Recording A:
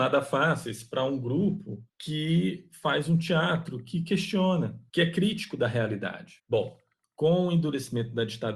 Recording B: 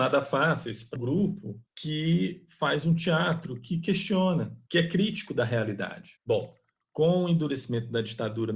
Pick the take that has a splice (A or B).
B